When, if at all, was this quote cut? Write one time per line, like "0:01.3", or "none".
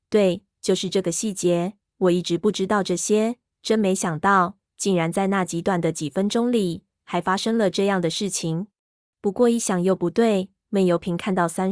0:09.0